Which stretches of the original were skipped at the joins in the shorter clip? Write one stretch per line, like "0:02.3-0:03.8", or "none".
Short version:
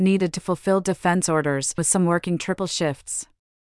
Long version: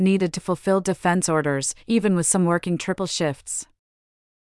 0:01.8-0:02.2